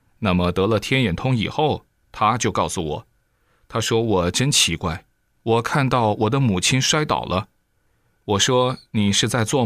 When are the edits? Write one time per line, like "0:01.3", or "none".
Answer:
none